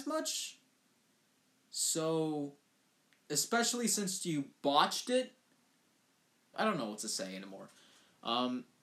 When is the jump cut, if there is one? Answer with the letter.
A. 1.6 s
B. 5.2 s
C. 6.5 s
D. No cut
C